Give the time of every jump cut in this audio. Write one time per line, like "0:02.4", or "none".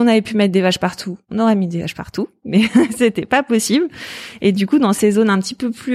none